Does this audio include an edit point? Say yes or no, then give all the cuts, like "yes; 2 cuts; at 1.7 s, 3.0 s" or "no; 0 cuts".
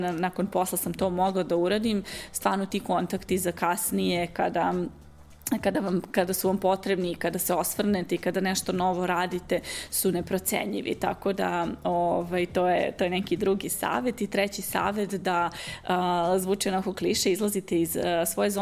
no; 0 cuts